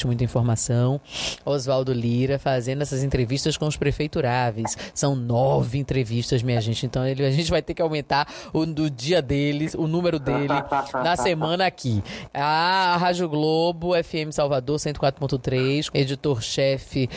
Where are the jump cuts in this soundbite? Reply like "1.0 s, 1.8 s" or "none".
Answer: 12.3 s, 15.9 s